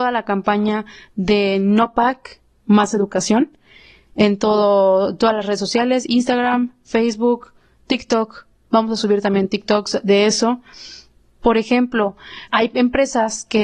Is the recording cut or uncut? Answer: cut